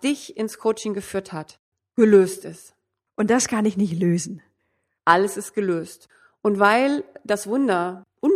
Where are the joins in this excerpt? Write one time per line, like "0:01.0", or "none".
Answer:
0:03.1
0:05.0